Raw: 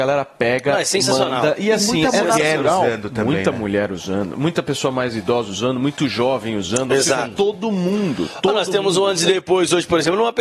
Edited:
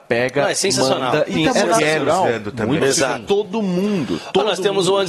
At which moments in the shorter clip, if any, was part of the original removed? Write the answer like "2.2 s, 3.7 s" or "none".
1.3 s, 2.8 s

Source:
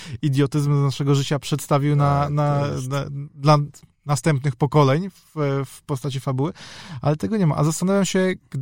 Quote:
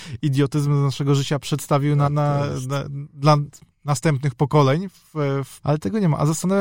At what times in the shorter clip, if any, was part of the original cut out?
2.1 s, 5.6 s

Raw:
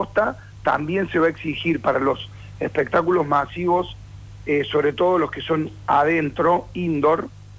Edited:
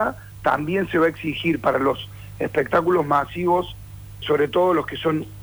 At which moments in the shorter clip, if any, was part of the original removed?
4.2 s

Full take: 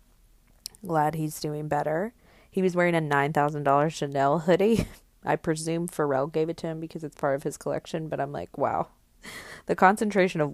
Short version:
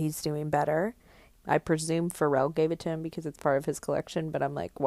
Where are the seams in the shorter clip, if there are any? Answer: 1.3 s

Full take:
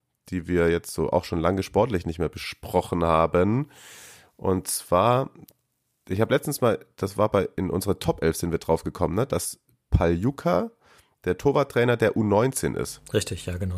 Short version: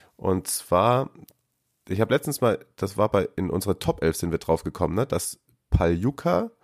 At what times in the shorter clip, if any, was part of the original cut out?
none

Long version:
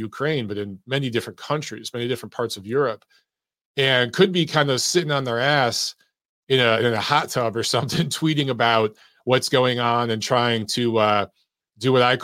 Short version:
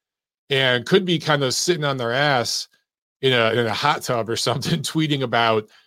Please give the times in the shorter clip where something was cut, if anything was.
none

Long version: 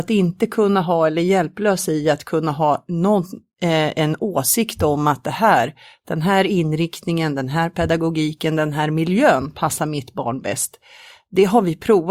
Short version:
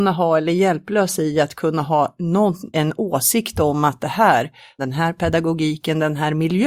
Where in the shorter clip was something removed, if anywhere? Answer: 2.7 s, 4.8 s

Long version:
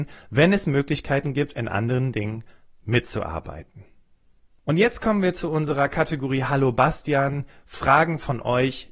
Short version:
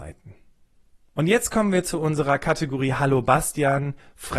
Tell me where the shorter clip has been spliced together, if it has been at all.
none

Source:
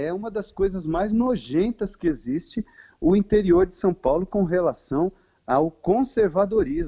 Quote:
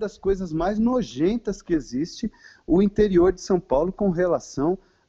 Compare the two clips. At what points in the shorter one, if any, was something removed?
none

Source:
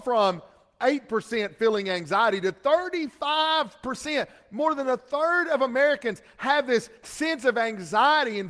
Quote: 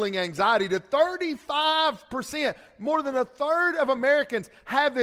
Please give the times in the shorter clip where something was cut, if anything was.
none

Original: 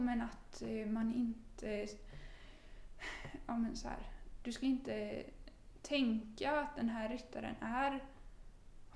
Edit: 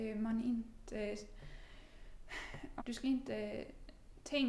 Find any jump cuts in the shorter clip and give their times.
2.8 s

